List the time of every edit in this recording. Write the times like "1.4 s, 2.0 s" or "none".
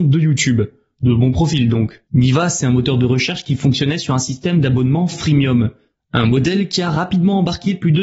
2.0 s

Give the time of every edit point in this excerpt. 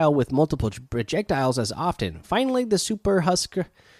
none

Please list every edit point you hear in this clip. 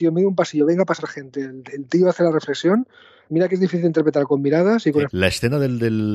3.2 s, 5.1 s

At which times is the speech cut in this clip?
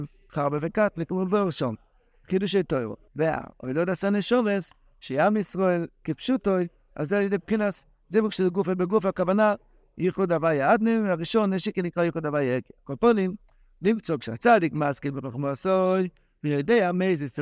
3.1 s

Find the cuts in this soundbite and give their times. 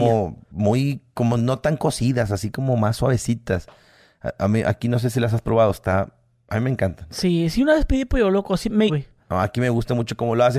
8.9 s

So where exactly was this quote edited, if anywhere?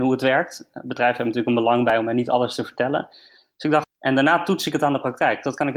3.8 s

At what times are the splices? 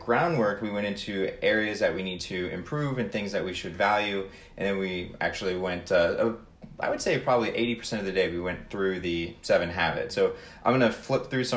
10.1 s

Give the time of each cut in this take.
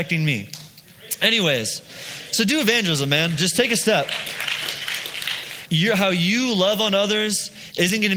5.7 s

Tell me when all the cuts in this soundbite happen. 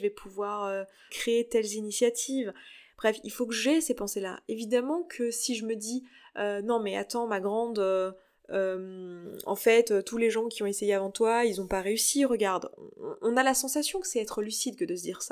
1.1 s

